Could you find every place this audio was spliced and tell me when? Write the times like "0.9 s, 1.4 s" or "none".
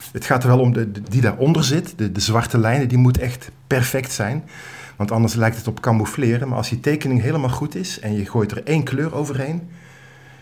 1.0 s